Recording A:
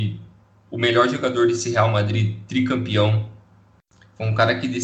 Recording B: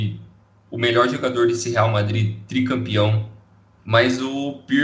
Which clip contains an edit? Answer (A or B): B